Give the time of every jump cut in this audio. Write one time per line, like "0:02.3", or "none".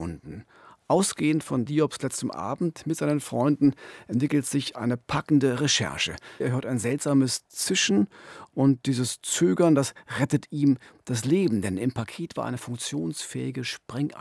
0:06.4

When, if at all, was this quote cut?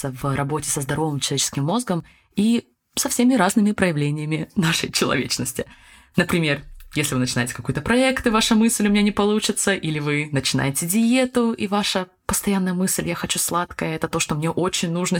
none

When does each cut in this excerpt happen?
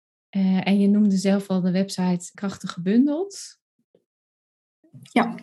0:02.3

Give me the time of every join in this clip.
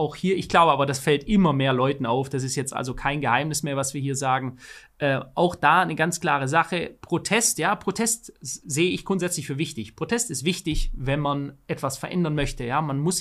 none

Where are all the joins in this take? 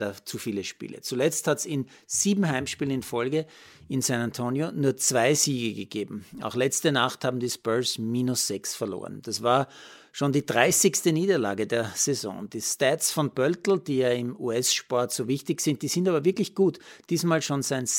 none

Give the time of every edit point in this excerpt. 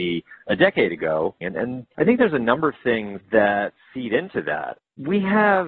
0:01.4

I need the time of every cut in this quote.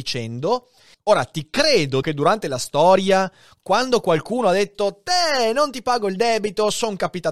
0:00.9
0:02.0

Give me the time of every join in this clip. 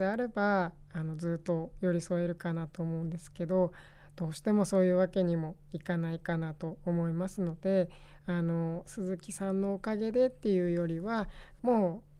none

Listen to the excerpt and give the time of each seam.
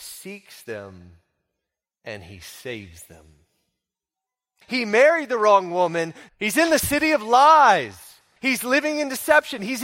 0:04.6
0:06.3
0:08.4

